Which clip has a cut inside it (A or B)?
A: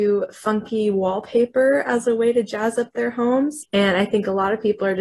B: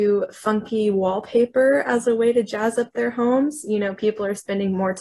A